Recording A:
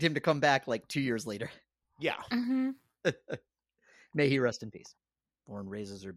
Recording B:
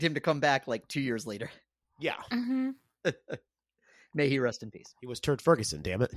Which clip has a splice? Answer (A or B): A